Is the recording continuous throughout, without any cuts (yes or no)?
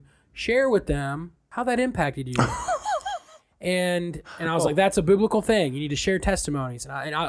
yes